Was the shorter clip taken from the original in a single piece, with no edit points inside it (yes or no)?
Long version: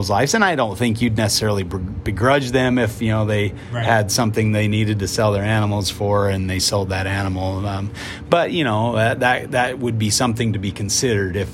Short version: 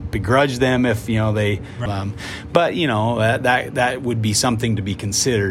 no